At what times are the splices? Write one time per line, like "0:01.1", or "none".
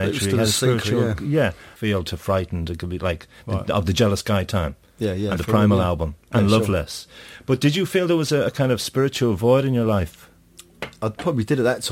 0:01.8